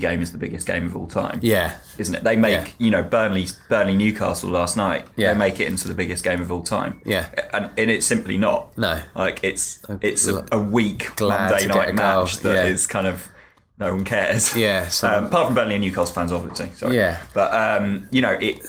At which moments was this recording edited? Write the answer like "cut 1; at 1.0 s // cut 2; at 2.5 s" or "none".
none